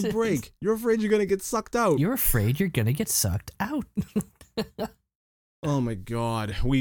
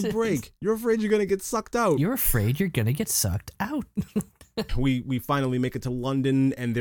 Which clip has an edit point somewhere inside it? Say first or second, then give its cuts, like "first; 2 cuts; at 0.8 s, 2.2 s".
second; 1 cut; at 4.7 s